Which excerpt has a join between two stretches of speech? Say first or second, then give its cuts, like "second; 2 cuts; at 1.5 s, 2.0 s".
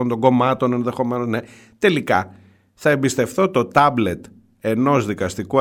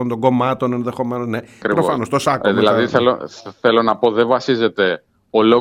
second; 1 cut; at 1.6 s